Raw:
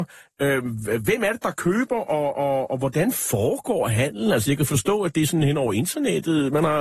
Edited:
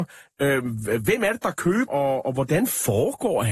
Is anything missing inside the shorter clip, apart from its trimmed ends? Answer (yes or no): yes